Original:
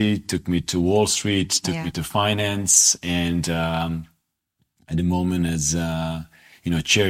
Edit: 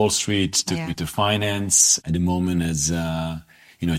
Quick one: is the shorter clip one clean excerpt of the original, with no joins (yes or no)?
no